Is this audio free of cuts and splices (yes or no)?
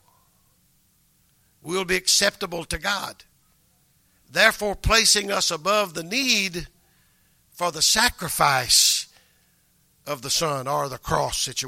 yes